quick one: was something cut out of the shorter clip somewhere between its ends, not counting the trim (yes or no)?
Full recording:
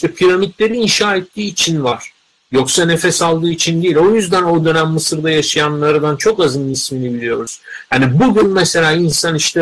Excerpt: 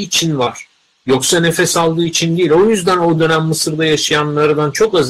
no